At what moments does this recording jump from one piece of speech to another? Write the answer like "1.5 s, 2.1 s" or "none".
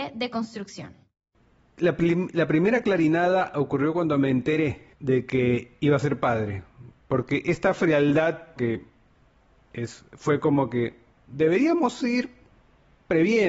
4.9 s, 8.6 s